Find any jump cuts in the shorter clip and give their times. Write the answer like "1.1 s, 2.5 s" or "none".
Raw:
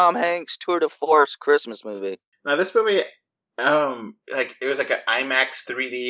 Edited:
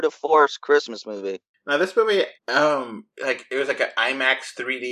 2.4 s